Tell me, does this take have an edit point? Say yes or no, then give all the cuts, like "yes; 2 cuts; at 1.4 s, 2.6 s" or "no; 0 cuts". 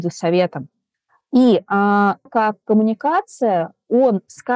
yes; 1 cut; at 2.3 s